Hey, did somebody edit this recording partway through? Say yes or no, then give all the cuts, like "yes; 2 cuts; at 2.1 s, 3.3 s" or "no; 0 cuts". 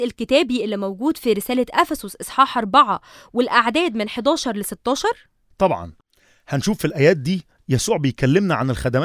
no; 0 cuts